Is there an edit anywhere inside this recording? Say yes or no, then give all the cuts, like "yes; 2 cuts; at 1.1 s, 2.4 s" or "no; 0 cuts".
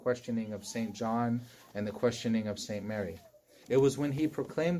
yes; 1 cut; at 3.6 s